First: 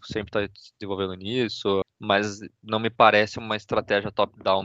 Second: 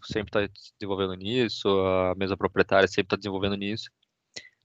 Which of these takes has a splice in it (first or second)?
first